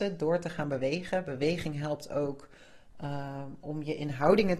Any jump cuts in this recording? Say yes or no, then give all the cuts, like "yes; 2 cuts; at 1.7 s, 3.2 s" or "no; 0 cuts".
no; 0 cuts